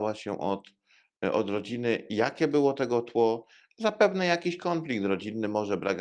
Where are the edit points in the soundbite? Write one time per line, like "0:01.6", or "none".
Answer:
none